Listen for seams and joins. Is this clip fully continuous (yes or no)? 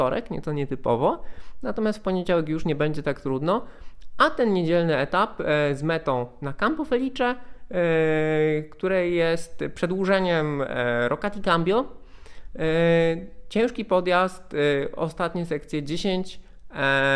yes